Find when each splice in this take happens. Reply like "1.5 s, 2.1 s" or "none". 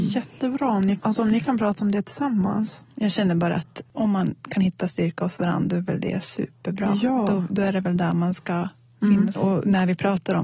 1.0 s, 9.3 s